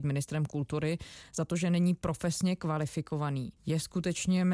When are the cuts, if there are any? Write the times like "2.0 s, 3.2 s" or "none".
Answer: 3.6 s